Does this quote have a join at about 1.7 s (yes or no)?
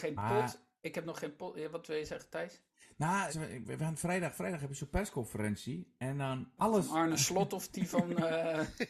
no